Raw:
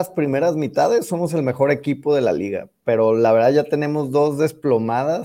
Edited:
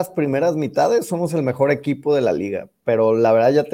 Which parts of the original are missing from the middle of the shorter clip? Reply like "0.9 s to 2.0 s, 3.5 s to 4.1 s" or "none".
none

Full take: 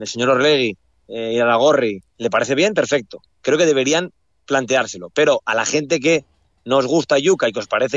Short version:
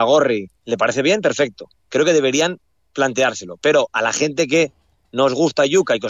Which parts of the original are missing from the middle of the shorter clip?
none

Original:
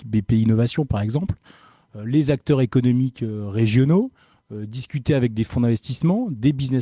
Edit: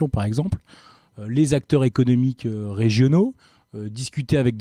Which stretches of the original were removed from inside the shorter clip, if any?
none

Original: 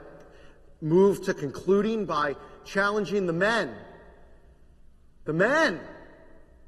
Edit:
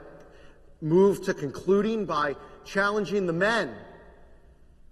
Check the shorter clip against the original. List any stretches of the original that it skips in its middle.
none

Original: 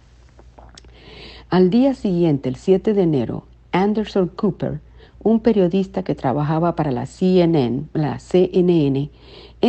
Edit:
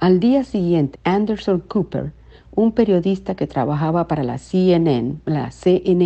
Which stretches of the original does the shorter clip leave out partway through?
2.4 s to 3.6 s

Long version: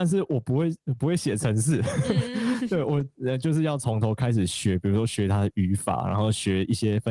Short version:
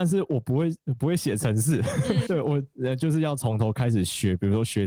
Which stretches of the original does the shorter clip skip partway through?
2.3 s to 2.7 s

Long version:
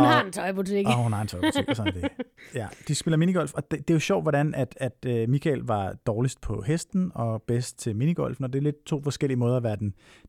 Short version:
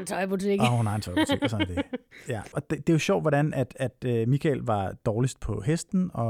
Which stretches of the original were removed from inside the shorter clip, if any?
2.8 s to 3.5 s

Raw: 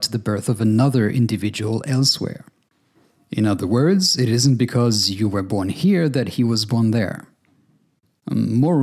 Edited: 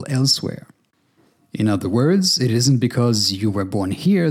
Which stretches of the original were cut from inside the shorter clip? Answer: none

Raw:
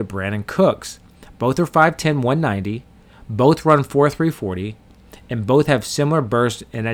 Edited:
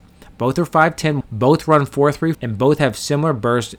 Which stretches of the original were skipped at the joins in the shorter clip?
2.2 s to 3.2 s, 4.3 s to 5.2 s

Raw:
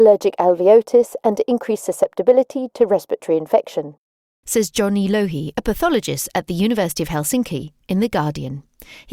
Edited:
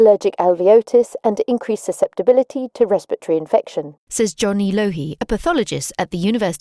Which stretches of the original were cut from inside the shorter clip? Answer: 4.0 s to 4.4 s

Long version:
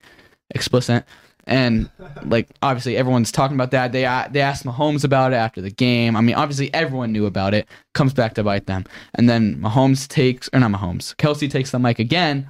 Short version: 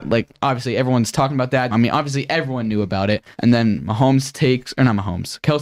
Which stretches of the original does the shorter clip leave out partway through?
3.9 s to 6.1 s, 7.8 s to 9.1 s

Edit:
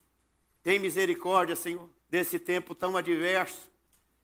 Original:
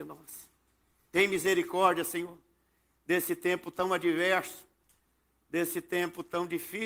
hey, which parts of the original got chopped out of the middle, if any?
2.5 s to 2.9 s

